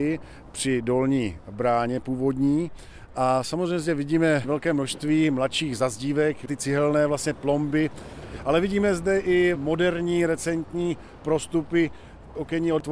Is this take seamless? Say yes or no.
yes